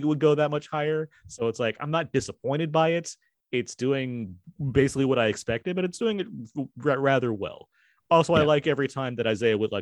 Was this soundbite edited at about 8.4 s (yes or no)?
no